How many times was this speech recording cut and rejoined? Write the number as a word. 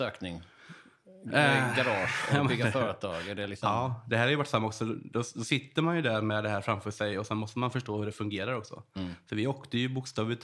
zero